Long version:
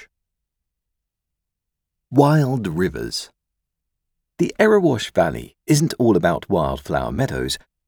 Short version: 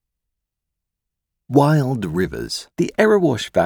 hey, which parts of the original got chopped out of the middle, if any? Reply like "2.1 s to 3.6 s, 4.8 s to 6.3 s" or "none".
3.3 s to 4.3 s